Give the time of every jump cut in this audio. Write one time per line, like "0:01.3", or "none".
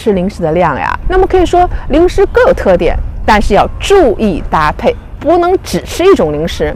0:01.0

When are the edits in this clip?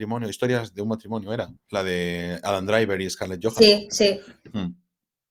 none

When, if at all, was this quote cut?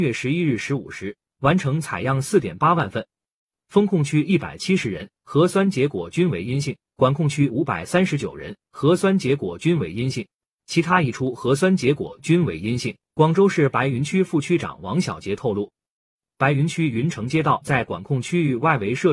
0:13.1

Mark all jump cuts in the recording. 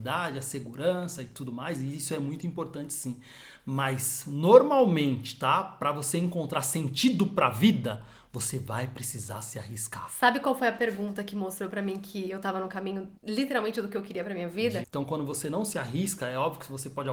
0:13.2
0:14.8

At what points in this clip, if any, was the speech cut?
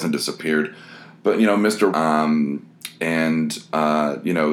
0:01.9

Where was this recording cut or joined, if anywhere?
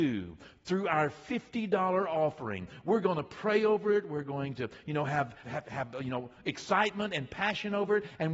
0:05.4

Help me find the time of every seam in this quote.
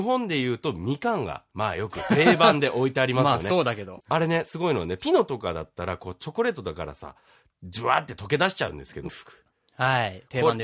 0:04.0
0:09.1

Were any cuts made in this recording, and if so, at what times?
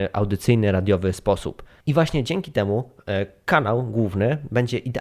none

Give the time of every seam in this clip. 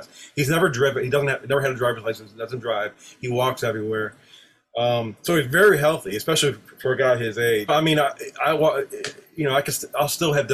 0:07.7

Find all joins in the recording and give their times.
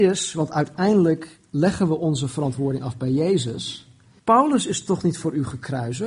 0:04.2

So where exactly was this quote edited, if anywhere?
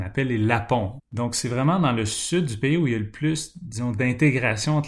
0:01.0

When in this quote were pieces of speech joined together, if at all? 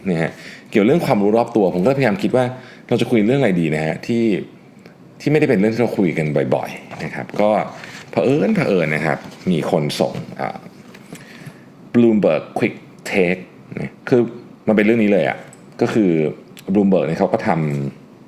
0:14.0

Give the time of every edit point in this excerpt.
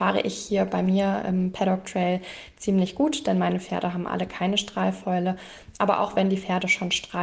none

